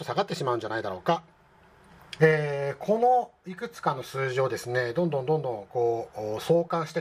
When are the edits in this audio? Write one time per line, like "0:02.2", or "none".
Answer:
0:02.2